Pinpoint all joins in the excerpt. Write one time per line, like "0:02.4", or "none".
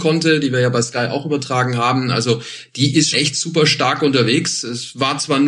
0:03.1